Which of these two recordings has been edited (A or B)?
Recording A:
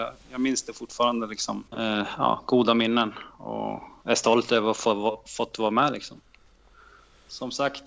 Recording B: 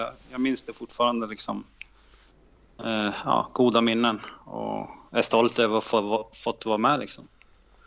A